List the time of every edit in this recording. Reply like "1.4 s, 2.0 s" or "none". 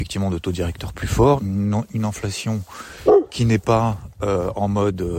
1.4 s